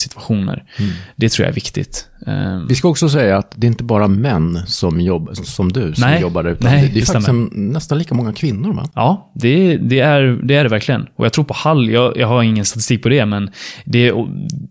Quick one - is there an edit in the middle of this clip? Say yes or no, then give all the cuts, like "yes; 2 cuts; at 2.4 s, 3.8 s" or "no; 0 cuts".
no; 0 cuts